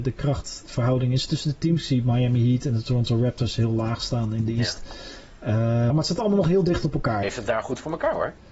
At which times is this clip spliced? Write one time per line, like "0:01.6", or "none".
0:05.9
0:07.2